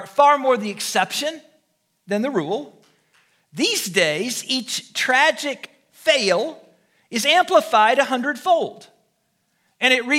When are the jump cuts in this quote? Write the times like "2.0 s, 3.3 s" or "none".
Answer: none